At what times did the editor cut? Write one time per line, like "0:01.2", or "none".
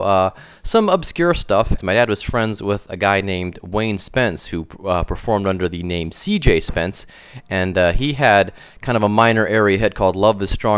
0:01.8